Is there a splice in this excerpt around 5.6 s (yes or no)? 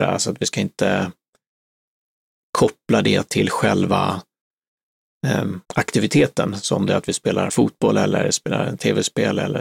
yes